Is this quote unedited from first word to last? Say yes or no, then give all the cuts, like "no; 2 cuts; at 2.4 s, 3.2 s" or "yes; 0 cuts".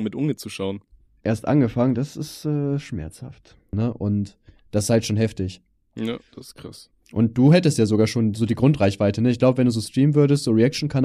no; 1 cut; at 3.7 s